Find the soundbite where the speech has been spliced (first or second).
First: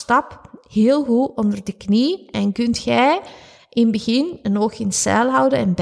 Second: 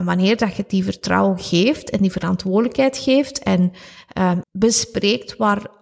second